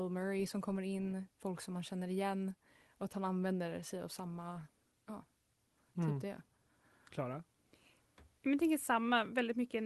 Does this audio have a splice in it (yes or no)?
no